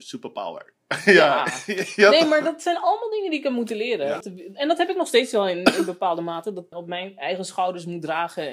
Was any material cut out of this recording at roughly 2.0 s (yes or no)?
no